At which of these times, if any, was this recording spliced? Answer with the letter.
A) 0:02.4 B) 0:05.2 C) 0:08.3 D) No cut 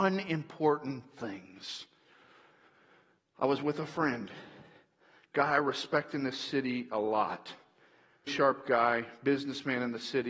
C